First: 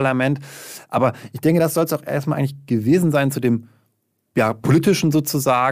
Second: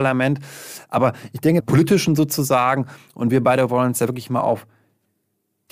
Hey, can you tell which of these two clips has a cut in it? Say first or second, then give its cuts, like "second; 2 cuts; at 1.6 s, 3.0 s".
second; 1 cut; at 1.6 s